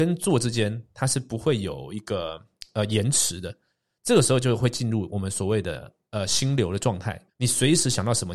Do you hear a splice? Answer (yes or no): yes